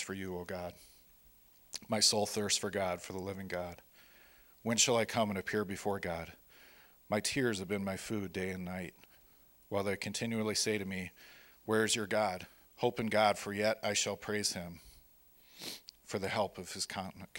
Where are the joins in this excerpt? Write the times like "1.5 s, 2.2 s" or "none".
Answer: 12.7 s